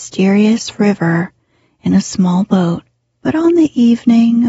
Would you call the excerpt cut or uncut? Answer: cut